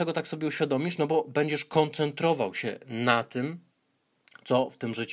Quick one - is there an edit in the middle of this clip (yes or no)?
no